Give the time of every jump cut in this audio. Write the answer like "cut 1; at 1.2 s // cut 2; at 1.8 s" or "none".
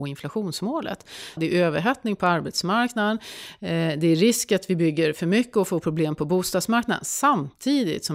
cut 1; at 1.4 s